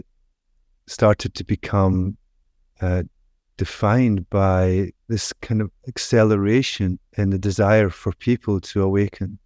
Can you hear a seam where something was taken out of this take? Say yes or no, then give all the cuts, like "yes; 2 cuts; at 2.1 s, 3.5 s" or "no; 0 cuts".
yes; 2 cuts; at 5.0 s, 7.1 s